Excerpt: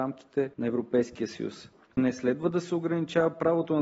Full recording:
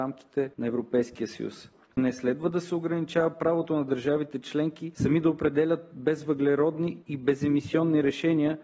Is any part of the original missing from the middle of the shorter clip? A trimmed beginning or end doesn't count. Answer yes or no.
no